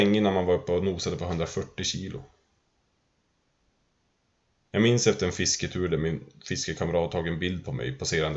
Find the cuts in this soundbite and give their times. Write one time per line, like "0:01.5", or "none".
none